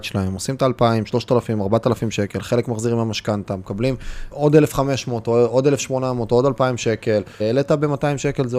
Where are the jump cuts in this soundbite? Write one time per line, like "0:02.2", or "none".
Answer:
0:04.3
0:07.4